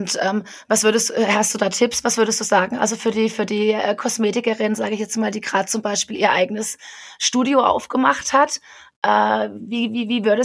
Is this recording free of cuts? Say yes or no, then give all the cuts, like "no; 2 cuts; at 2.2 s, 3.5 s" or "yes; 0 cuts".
yes; 0 cuts